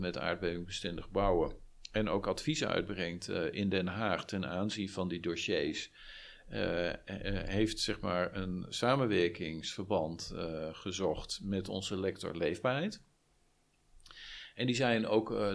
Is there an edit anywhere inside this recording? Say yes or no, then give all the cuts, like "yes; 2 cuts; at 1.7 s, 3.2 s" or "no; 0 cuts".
no; 0 cuts